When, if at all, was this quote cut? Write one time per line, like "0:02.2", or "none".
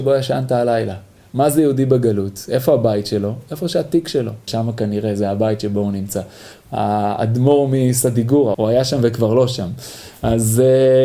0:04.5
0:06.5
0:08.5